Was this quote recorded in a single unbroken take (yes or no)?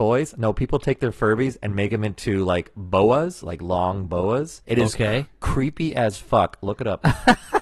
no